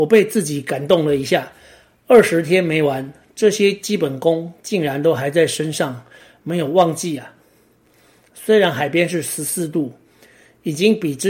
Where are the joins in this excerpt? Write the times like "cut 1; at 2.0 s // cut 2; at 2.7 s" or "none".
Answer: none

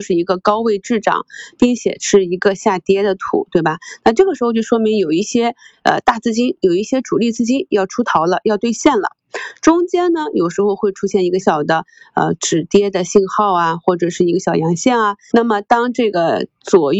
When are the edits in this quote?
cut 1; at 11.4 s // cut 2; at 15.3 s

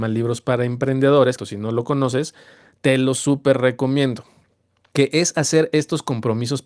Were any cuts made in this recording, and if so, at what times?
cut 1; at 1.4 s

